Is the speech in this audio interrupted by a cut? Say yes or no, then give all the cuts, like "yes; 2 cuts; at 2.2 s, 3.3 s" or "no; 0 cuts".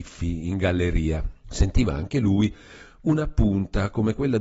yes; 1 cut; at 1.4 s